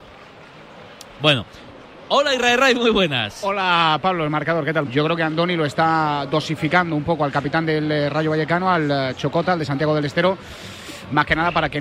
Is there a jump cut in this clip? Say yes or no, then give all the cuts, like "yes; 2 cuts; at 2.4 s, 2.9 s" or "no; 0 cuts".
yes; 1 cut; at 4.8 s